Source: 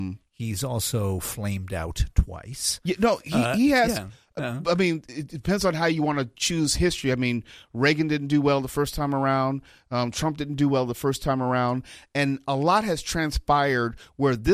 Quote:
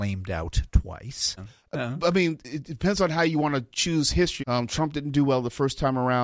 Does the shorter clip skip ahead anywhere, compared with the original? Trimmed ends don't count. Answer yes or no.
yes